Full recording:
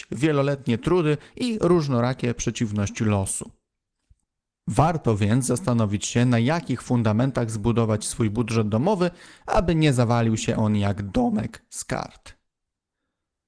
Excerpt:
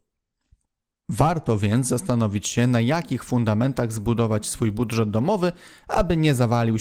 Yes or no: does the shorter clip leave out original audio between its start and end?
no